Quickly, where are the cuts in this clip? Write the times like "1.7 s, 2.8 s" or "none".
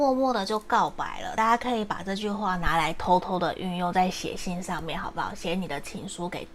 none